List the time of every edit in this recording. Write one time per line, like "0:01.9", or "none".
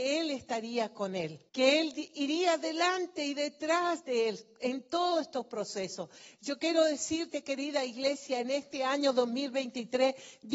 0:01.5